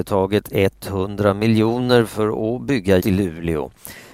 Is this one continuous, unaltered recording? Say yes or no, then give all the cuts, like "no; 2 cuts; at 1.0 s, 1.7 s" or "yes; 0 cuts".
no; 1 cut; at 3.0 s